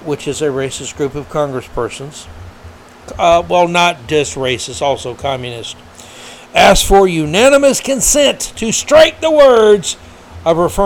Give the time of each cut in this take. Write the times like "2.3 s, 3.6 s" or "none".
none